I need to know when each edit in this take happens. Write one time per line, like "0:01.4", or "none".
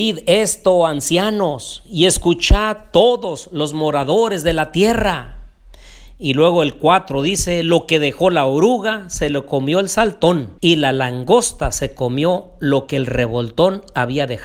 0:10.6